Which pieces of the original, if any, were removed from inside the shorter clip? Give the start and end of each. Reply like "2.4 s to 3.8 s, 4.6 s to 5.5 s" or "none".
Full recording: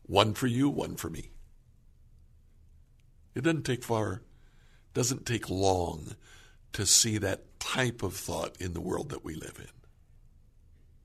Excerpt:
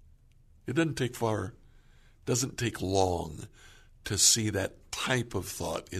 none